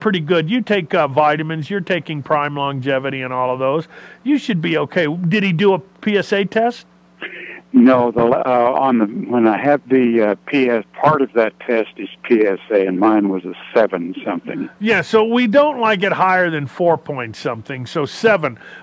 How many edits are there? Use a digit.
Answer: 1